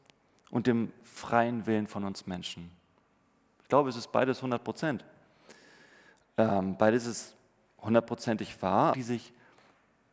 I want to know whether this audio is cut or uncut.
cut